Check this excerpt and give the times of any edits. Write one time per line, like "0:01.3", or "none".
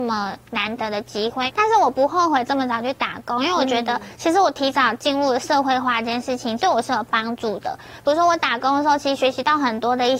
none